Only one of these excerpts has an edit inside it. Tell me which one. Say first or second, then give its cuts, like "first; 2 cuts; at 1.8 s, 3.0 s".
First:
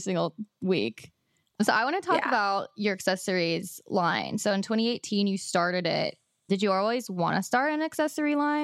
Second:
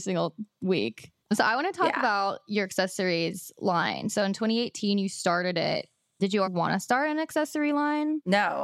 second; 2 cuts; at 1.2 s, 6.4 s